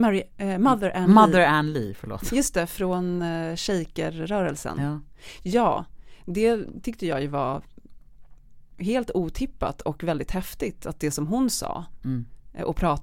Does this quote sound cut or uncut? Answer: uncut